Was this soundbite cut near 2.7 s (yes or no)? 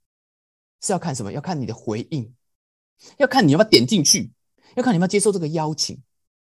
no